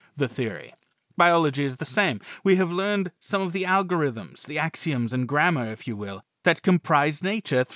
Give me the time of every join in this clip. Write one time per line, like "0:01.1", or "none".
none